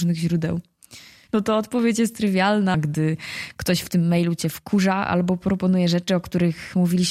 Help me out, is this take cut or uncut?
cut